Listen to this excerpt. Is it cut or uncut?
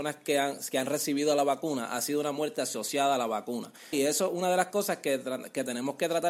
cut